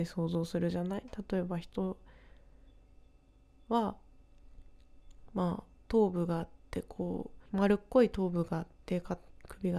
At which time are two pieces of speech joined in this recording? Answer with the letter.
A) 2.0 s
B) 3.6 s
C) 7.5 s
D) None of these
C